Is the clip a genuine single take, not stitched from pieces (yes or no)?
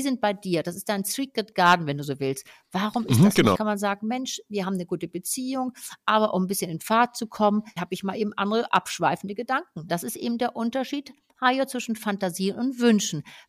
no